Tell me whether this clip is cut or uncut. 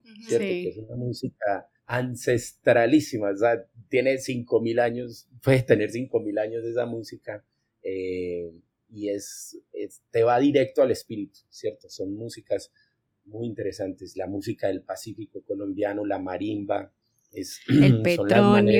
cut